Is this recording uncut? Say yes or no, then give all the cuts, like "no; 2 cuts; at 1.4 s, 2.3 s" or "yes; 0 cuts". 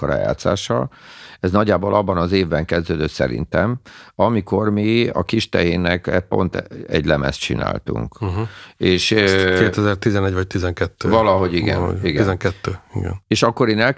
yes; 0 cuts